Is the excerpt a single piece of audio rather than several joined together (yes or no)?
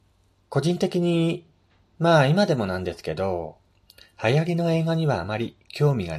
yes